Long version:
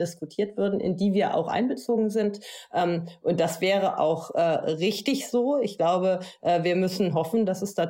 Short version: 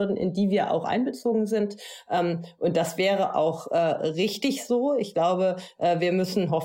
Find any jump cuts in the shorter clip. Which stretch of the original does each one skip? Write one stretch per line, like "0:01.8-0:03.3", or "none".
none